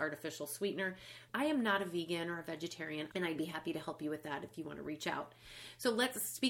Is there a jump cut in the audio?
yes; 2 cuts; at 1.3 s, 3.1 s

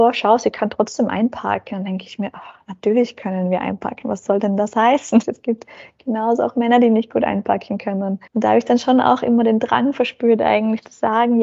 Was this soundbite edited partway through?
yes; 2 cuts; at 5.2 s, 8.3 s

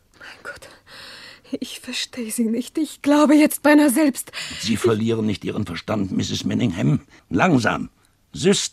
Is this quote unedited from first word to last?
no; 1 cut; at 7.2 s

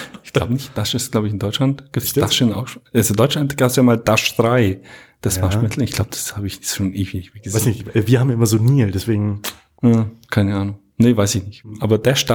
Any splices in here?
no; 0 cuts

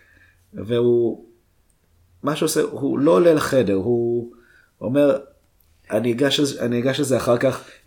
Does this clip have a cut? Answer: no; 0 cuts

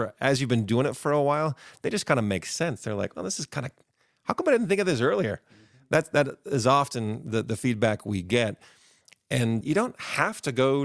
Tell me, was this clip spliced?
yes; 1 cut; at 9.6 s

